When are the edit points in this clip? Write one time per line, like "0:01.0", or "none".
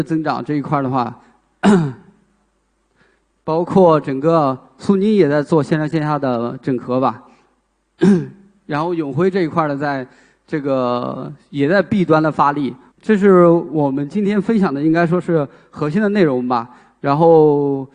0:12.9